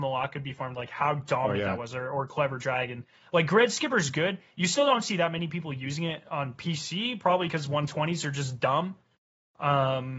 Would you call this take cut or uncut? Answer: uncut